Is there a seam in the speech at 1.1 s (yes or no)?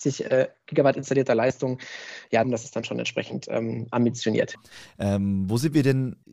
no